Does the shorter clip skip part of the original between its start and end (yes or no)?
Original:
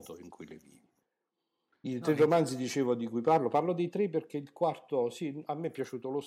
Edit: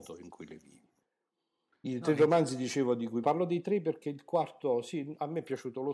yes